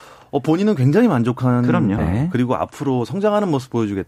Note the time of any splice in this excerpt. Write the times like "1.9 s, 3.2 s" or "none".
2.0 s